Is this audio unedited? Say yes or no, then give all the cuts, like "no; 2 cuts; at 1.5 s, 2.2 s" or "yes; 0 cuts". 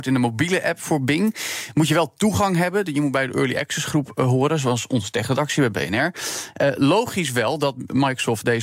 yes; 0 cuts